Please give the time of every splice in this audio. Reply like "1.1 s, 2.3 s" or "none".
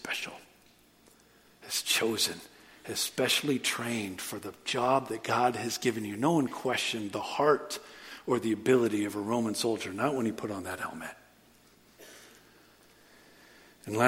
none